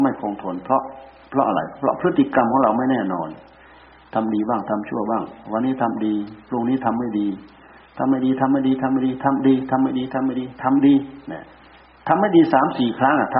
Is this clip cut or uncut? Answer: uncut